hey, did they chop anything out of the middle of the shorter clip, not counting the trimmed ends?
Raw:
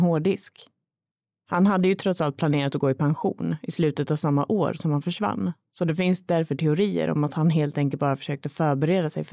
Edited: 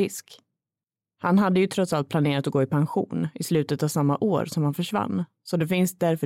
no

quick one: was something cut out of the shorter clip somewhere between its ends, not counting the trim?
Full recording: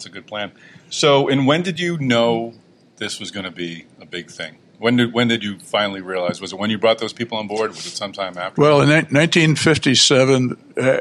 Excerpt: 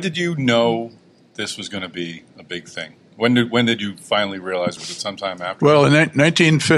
yes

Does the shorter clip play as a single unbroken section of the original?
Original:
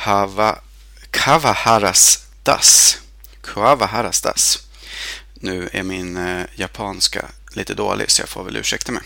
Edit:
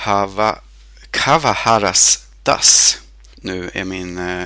no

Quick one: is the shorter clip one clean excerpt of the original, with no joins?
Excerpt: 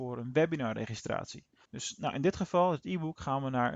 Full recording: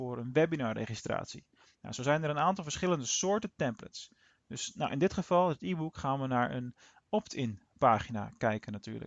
no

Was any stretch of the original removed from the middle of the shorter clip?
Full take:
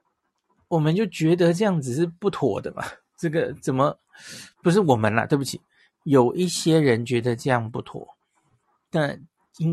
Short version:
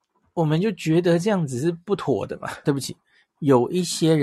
yes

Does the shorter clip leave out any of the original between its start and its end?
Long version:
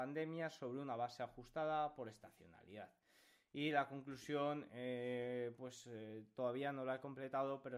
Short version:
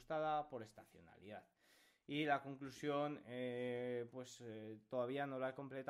no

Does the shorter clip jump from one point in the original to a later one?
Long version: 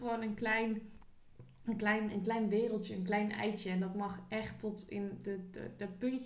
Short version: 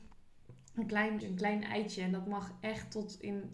yes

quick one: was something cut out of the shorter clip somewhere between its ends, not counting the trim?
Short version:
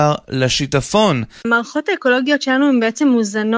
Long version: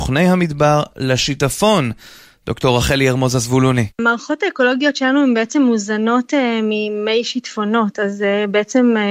yes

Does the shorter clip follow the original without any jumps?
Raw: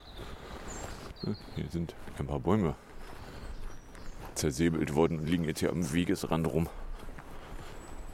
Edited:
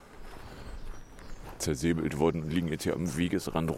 yes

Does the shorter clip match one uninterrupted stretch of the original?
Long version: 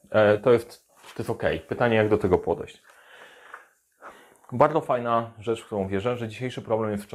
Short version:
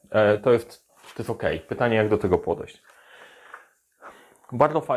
yes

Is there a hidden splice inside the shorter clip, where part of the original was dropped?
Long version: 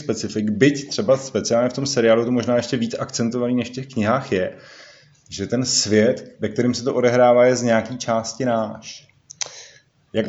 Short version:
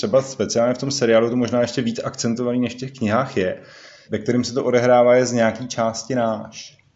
yes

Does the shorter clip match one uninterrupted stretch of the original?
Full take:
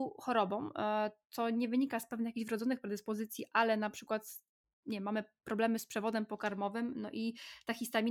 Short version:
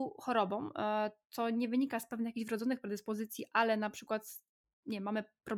yes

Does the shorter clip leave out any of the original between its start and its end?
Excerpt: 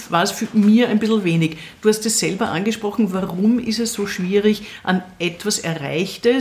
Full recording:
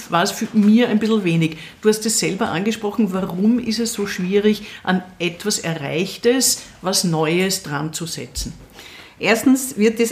no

